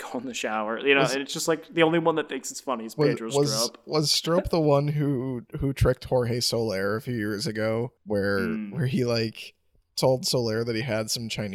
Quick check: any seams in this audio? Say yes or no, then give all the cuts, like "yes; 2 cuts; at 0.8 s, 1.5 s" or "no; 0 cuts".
yes; 1 cut; at 8.0 s